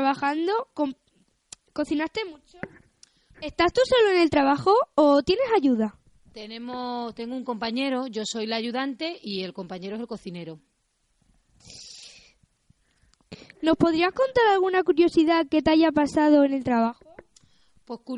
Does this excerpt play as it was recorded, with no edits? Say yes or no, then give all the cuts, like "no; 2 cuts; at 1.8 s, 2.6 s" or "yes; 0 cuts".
no; 2 cuts; at 3.3 s, 13.5 s